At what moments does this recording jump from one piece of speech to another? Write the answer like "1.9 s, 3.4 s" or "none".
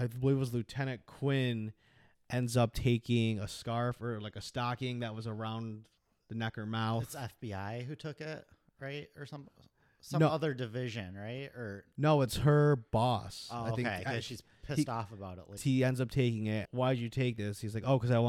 15.6 s, 16.6 s